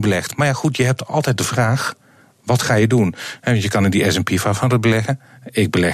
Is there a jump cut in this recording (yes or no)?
no